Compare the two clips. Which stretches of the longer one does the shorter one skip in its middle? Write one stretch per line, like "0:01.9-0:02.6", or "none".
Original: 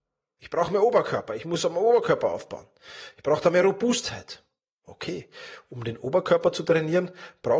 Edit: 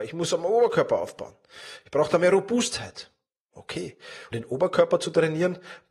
0:05.6-0:05.8